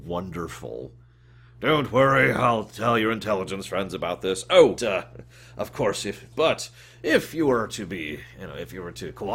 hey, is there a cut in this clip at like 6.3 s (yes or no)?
yes